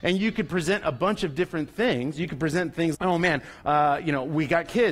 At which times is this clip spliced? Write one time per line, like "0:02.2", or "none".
0:02.9